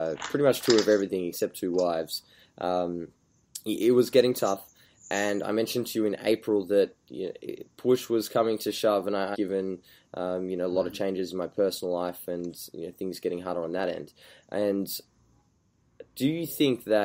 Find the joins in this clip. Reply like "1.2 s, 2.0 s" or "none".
9.3 s